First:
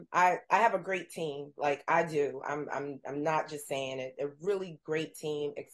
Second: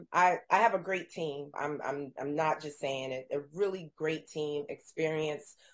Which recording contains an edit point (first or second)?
second